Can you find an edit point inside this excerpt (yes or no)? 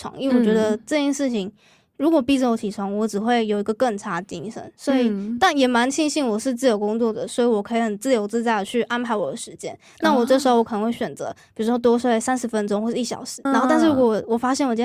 yes